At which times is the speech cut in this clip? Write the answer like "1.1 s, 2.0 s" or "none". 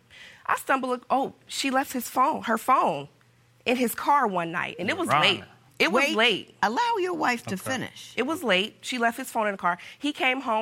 5.7 s